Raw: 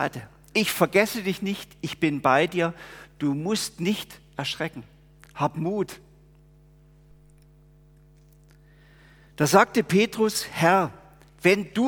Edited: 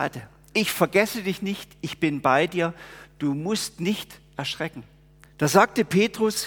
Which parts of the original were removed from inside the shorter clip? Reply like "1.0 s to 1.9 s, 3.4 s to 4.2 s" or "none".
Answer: 5.2 s to 9.2 s